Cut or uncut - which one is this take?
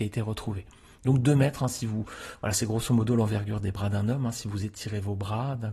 uncut